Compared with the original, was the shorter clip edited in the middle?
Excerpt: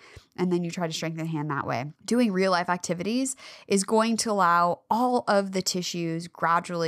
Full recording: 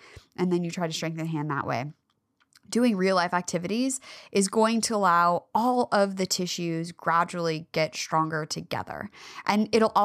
yes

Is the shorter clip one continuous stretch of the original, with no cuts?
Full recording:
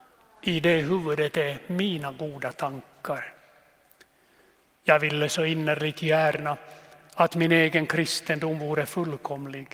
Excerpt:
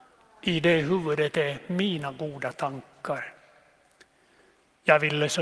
yes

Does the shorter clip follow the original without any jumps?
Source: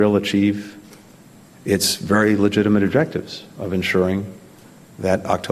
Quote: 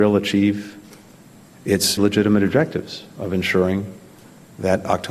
no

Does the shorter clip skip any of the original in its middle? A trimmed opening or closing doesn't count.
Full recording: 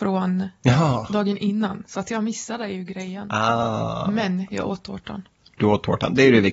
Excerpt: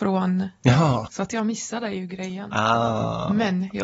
yes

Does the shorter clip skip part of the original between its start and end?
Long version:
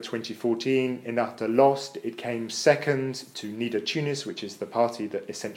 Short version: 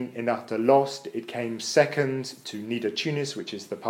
no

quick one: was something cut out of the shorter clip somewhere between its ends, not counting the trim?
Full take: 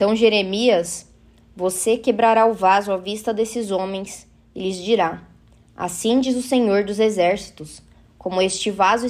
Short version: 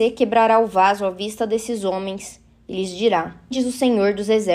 yes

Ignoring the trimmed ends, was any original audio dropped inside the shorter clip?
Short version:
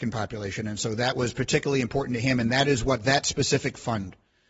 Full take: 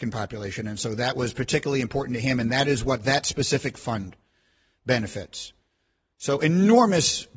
no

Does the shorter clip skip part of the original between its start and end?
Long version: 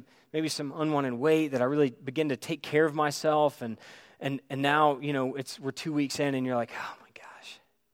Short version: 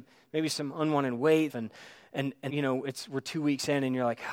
yes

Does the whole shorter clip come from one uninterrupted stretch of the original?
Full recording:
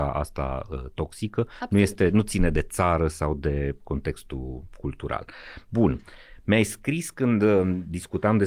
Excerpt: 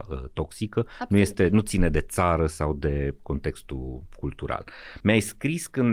no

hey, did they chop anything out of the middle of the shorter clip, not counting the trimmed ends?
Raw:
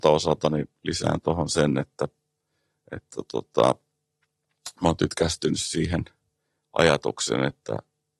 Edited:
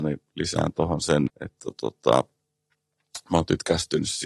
yes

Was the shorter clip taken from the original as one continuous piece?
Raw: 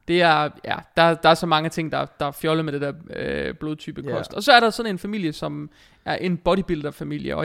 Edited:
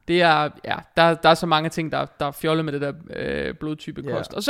yes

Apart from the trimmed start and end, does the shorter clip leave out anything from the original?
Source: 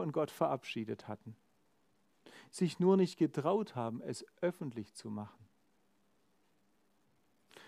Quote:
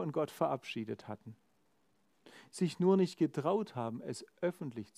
no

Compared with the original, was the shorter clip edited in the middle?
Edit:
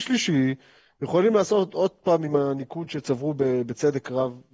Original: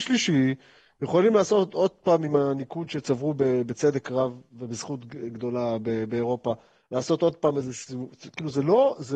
no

